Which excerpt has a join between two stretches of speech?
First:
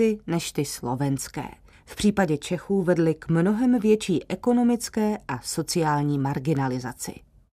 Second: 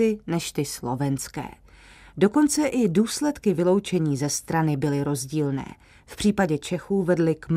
first; 1 cut; at 1.7 s

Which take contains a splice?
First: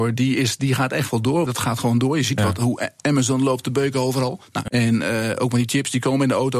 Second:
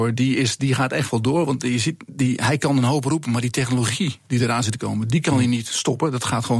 first; 2 cuts; at 1.5 s, 4.7 s

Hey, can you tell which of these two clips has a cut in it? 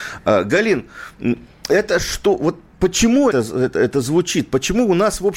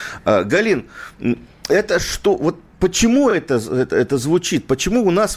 first; 1 cut; at 3.3 s

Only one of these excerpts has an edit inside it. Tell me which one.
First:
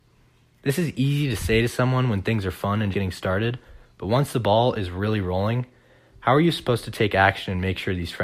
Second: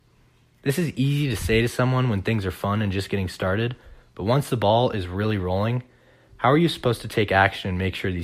first; 1 cut; at 2.9 s

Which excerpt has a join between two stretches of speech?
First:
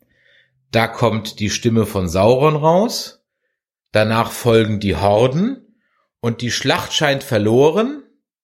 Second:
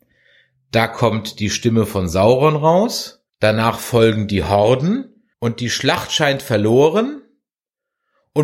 second; 2 cuts; at 3.3 s, 5.3 s

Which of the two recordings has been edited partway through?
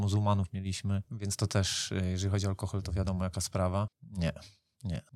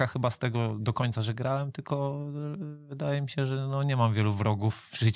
first; 1 cut; at 3.9 s

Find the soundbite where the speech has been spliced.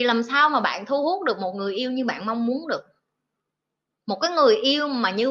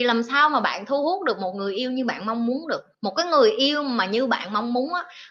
second; 1 cut; at 2.9 s

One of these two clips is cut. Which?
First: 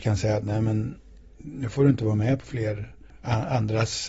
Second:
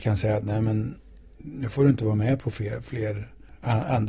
first; 1 cut; at 2.4 s

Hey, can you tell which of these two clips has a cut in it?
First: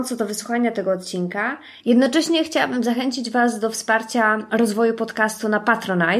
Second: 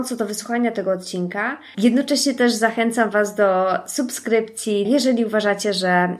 second; 2 cuts; at 1.7 s, 4.8 s

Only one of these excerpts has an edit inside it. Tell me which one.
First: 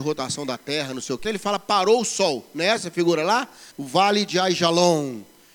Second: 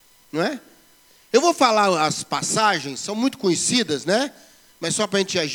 first; 2 cuts; at 1.2 s, 3.7 s

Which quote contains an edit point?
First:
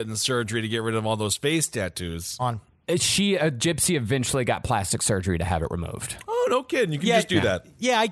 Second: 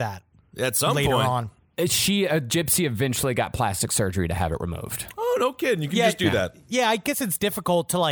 first; 1 cut; at 2.4 s

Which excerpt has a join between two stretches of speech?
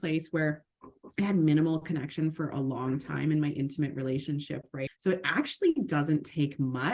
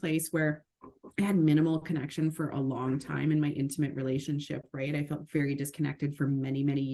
first; 1 cut; at 4.9 s

